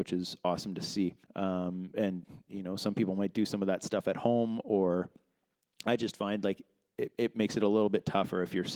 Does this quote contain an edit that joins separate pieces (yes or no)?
yes